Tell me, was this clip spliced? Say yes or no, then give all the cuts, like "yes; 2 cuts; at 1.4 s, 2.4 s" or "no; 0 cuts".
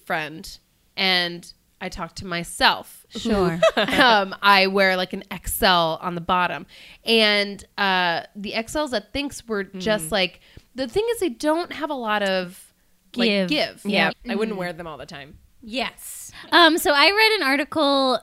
yes; 2 cuts; at 14.1 s, 15.5 s